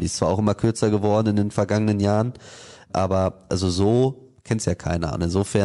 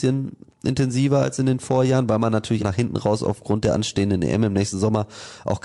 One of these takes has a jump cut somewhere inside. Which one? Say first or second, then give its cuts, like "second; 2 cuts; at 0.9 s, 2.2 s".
second; 1 cut; at 2.6 s